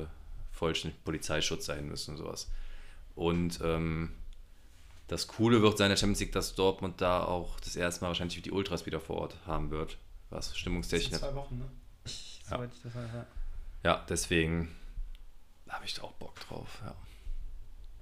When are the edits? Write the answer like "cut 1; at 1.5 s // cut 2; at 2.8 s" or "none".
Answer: cut 1; at 12.1 s